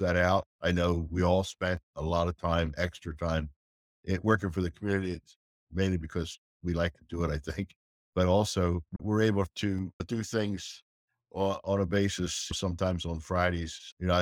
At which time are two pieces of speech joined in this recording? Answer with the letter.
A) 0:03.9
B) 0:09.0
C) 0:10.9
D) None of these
B